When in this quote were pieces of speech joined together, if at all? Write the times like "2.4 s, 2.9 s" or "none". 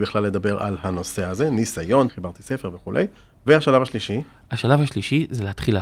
2.1 s